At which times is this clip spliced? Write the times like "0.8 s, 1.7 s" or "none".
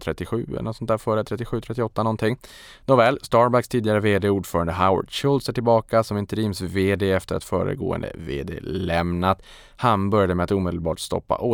none